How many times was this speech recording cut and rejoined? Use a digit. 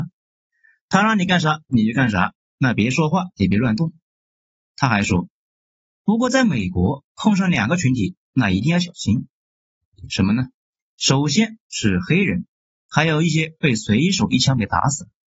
2